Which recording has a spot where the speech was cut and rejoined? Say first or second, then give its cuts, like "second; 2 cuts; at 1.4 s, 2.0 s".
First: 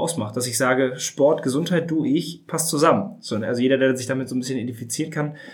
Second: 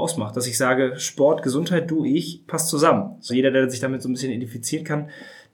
second; 1 cut; at 3.3 s